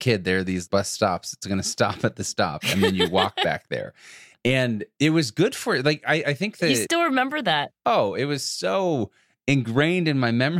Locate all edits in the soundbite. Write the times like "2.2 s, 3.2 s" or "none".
none